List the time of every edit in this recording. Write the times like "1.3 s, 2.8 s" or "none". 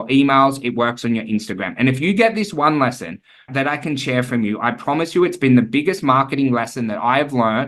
3.5 s